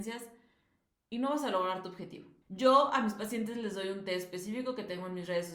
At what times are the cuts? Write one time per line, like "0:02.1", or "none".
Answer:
0:02.4